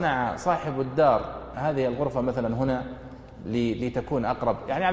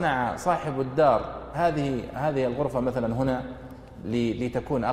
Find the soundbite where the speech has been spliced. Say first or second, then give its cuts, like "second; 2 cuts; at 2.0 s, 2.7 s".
first; 1 cut; at 1.5 s